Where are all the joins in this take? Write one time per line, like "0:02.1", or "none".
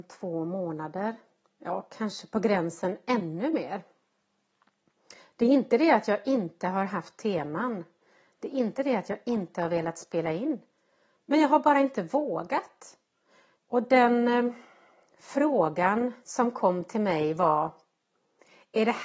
0:13.6